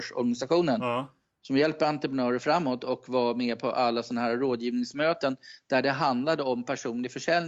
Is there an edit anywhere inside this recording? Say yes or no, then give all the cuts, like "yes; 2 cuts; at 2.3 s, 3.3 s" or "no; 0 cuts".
no; 0 cuts